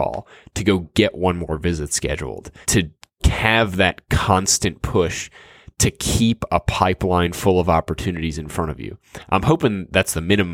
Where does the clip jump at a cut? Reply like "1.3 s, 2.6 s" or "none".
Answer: 2.6 s